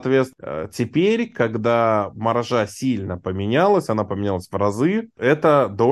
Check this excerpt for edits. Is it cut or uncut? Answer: uncut